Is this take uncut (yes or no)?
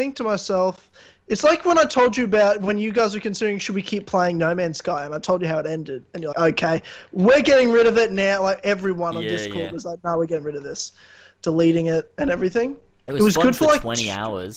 no